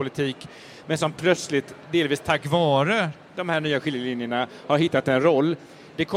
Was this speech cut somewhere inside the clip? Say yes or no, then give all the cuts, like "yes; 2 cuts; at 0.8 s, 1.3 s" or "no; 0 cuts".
no; 0 cuts